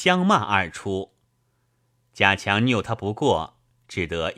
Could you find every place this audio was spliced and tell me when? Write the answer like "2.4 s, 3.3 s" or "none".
none